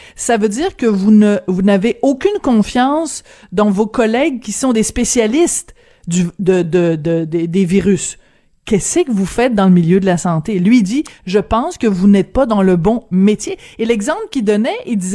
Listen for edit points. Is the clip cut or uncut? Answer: uncut